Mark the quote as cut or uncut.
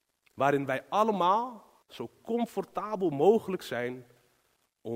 cut